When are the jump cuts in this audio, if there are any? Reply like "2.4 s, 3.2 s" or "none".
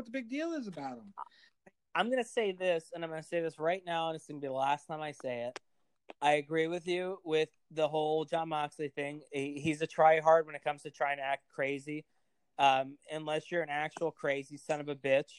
none